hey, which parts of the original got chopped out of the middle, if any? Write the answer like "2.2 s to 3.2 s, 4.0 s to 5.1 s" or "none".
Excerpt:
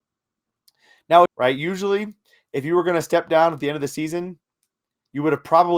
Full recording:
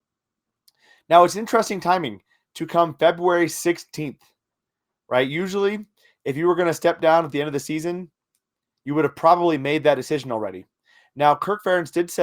1.3 s to 5.0 s